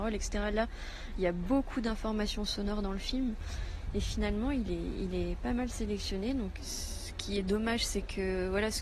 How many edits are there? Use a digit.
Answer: 1